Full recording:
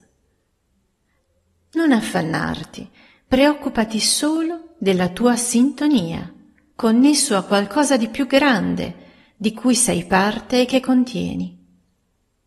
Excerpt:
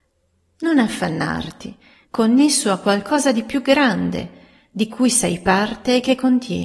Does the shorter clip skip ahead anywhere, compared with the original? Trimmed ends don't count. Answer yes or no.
yes